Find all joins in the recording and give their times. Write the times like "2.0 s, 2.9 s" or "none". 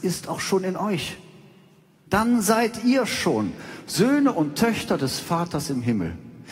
2.1 s